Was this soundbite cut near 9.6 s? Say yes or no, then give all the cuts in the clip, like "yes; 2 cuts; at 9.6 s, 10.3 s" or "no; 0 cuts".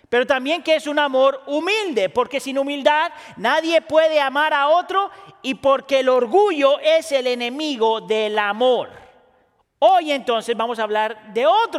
yes; 1 cut; at 9.6 s